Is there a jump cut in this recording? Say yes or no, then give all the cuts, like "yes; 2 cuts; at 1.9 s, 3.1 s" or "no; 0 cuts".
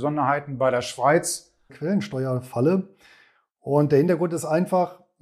yes; 1 cut; at 1.7 s